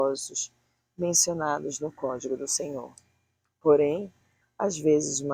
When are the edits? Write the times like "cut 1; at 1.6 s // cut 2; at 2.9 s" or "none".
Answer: cut 1; at 4.4 s